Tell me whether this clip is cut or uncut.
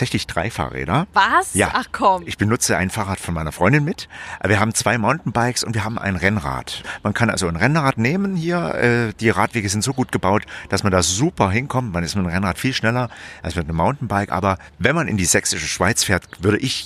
uncut